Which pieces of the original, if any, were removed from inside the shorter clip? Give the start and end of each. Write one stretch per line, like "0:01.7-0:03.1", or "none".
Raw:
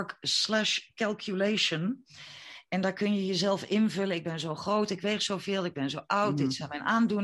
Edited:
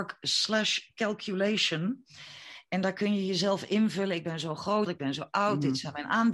0:04.9-0:05.6

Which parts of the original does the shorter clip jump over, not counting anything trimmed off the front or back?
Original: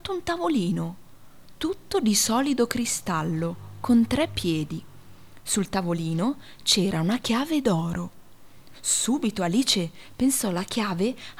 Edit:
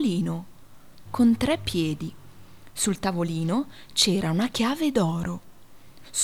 0:01.6-0:03.8

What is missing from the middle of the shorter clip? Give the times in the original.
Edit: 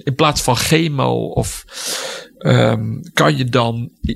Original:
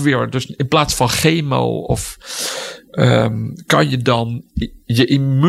none

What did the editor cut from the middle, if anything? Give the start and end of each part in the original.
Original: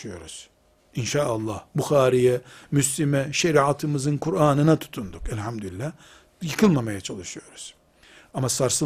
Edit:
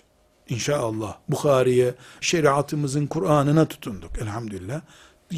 0:02.7-0:03.3

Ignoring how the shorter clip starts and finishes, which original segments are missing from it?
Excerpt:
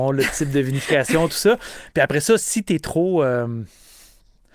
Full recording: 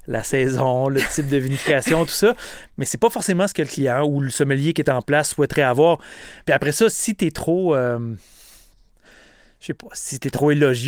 0:02.7-0:06.4

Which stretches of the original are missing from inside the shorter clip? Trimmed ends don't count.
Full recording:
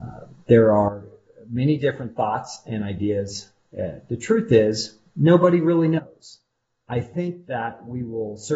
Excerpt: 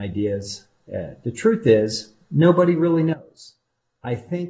none

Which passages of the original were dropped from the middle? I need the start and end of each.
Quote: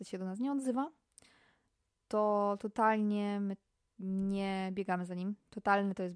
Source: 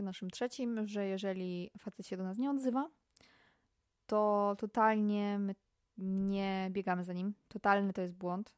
none

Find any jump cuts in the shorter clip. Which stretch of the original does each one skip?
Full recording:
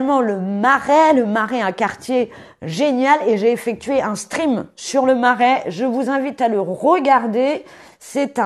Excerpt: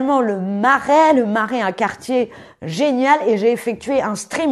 none

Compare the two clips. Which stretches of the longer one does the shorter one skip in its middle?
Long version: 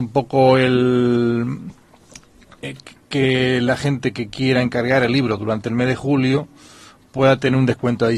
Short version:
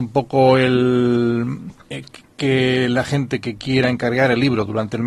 0:01.8-0:02.5

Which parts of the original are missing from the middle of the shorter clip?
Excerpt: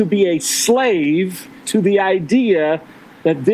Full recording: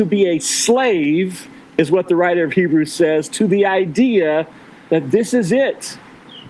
0:01.6-0:03.3

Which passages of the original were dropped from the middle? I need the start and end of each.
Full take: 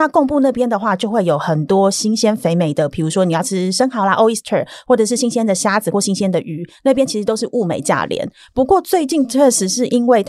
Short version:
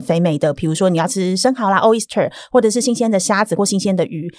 none

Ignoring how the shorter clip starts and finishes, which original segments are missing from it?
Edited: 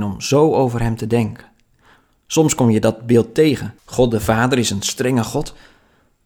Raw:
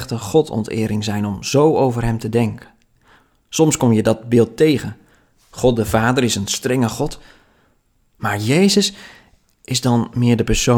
0:05.0-0:05.4

